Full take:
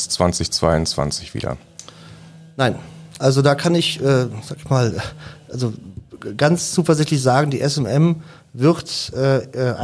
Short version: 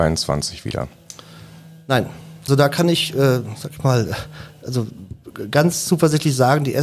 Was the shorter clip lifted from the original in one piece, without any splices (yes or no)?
no